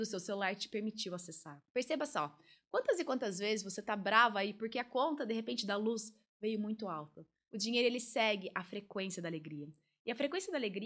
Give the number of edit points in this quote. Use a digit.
2